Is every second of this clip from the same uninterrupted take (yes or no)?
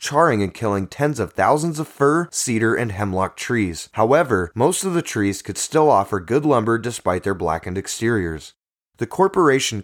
yes